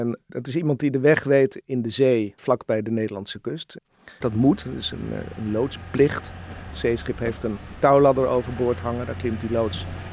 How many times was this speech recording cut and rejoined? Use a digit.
2